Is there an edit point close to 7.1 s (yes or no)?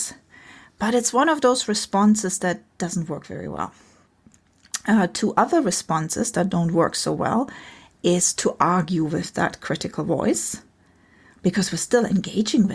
no